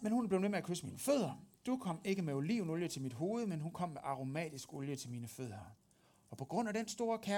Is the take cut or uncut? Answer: uncut